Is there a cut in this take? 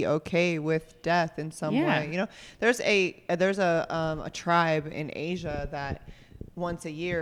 no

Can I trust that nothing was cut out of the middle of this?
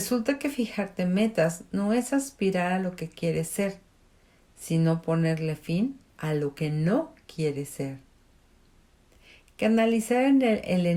no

